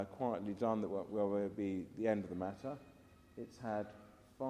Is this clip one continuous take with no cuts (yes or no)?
yes